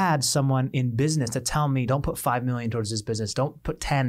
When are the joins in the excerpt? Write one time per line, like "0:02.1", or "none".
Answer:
0:01.9